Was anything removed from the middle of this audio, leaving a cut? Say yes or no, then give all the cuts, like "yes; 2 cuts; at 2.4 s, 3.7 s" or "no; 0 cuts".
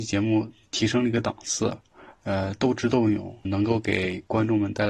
yes; 1 cut; at 3.4 s